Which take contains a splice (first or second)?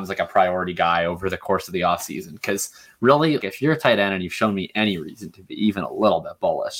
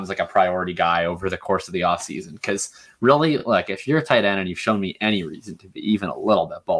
first